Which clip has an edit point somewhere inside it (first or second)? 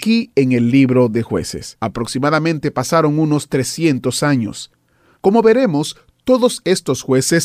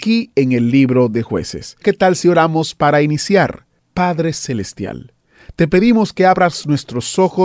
first